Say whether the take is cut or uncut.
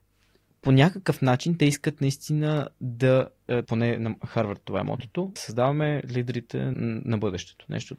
cut